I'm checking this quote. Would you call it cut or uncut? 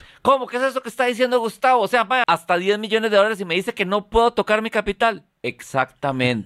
cut